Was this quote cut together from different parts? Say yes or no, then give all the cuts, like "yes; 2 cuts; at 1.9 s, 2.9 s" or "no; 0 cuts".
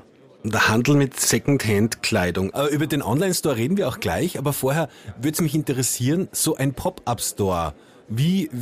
yes; 1 cut; at 2.5 s